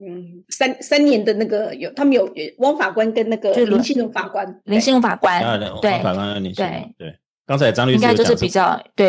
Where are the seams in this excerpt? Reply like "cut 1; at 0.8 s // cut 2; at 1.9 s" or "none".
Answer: cut 1; at 7.4 s